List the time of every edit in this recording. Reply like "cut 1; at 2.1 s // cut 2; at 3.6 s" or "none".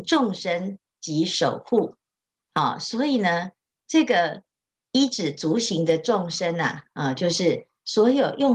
none